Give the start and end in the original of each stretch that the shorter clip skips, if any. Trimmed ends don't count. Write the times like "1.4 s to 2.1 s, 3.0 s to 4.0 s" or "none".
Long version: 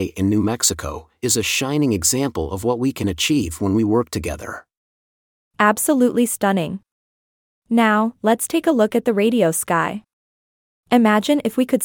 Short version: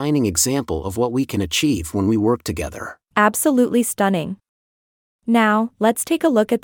4.7 s to 5.5 s